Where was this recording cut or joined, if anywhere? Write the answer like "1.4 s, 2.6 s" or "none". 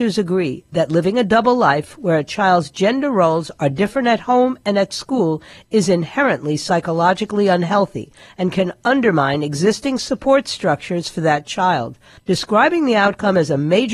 12.2 s